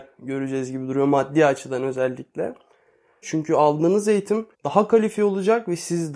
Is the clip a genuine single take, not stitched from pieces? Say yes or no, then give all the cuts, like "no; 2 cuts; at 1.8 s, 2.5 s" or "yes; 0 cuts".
no; 2 cuts; at 3.2 s, 4.5 s